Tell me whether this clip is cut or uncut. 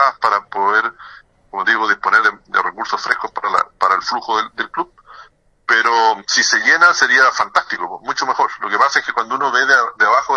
uncut